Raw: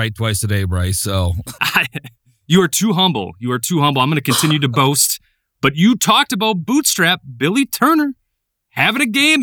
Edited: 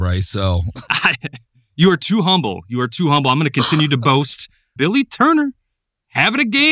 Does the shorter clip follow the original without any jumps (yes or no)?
no